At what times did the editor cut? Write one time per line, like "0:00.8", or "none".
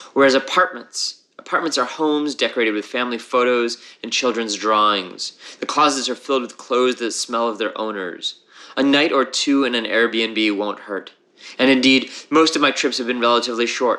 0:11.5